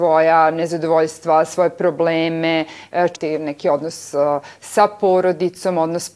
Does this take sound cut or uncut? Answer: cut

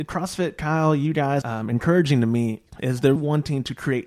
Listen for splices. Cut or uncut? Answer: cut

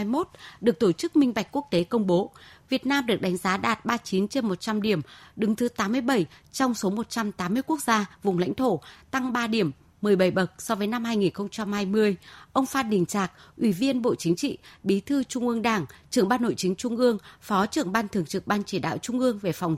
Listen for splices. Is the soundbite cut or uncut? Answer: uncut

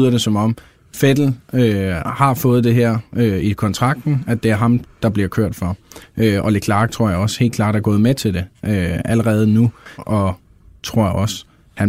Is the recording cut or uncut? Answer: cut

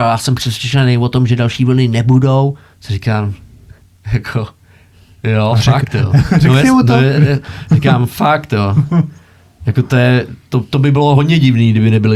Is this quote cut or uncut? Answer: uncut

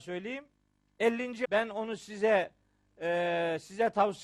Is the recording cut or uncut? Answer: cut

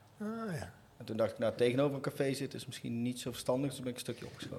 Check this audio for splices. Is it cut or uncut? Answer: uncut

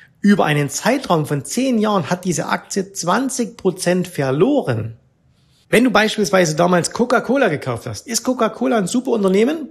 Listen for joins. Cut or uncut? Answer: cut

